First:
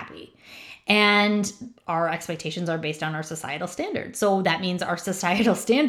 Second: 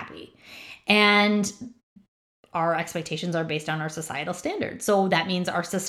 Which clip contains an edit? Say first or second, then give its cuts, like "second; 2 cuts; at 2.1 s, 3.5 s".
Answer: first; 1 cut; at 1.8 s